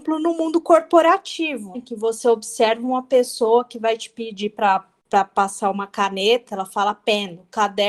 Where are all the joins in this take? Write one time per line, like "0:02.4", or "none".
0:01.7
0:06.5